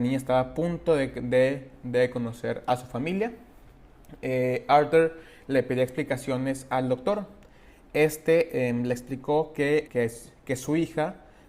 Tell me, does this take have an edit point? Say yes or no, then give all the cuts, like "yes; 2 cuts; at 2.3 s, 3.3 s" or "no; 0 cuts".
yes; 1 cut; at 9.9 s